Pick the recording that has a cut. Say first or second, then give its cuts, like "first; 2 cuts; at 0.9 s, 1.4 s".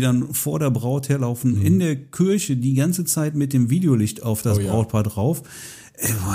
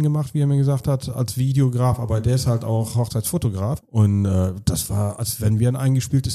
second; 1 cut; at 3.8 s